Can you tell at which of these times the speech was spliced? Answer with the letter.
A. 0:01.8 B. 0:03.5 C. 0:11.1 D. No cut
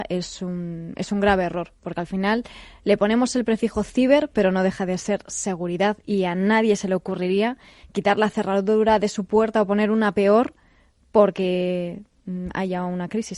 D